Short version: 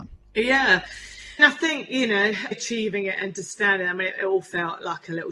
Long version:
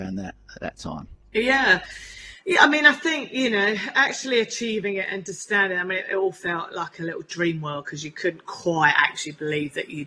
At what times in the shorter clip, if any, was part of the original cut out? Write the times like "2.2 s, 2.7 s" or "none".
1.4 s, 2.5 s